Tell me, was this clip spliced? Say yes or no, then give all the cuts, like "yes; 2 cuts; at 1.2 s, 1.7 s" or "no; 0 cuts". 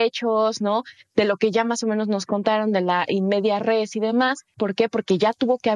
yes; 1 cut; at 4.5 s